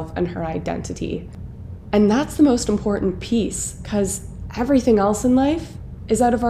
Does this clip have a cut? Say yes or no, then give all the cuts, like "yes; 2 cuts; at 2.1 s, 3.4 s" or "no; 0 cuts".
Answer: no; 0 cuts